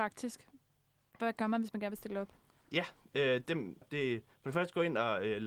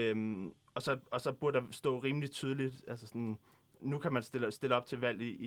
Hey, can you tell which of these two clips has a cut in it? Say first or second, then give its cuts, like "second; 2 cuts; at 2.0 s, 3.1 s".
first; 1 cut; at 3.8 s